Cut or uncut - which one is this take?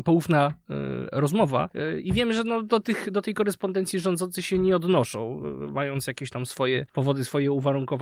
uncut